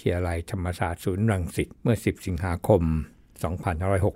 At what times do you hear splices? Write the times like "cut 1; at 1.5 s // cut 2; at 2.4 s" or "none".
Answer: cut 1; at 1.7 s